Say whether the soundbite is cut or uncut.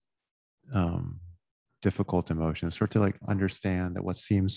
uncut